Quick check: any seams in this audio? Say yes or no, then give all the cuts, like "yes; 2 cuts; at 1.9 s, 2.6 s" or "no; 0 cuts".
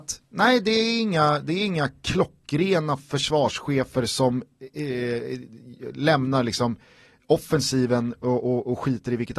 no; 0 cuts